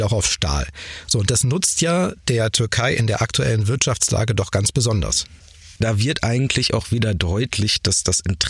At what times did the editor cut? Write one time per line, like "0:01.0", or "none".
0:05.8